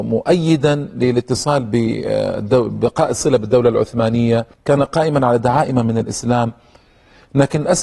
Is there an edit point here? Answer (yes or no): yes